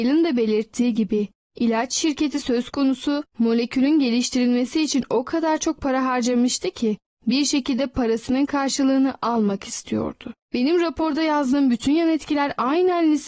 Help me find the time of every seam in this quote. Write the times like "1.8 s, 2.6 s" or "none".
10.4 s